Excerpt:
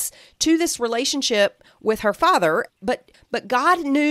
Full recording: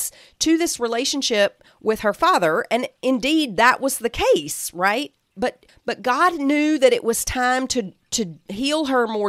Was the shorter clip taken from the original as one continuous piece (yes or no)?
no